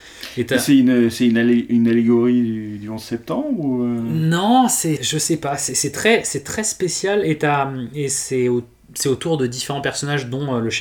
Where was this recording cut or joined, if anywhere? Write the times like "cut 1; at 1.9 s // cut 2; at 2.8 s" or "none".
cut 1; at 5.0 s